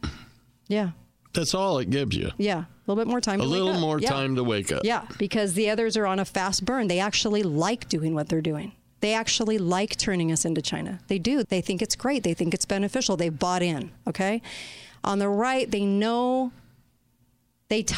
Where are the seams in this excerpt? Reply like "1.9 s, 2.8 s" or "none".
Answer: 11.4 s